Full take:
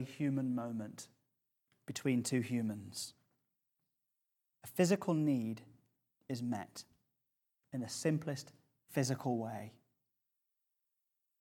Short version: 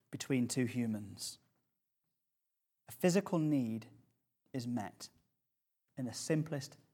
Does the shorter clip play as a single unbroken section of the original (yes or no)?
yes